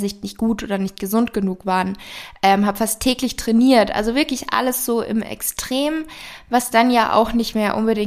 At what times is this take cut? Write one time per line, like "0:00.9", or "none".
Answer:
none